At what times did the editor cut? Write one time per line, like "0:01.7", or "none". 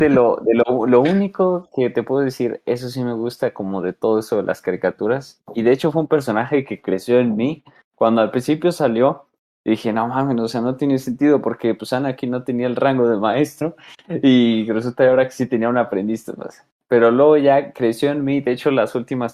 none